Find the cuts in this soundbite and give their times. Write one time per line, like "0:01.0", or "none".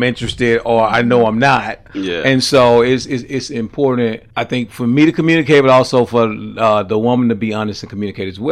0:04.3